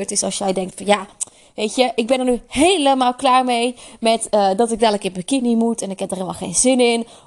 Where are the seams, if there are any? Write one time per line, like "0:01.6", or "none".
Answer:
none